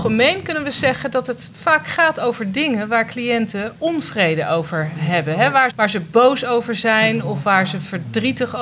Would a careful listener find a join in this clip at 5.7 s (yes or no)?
yes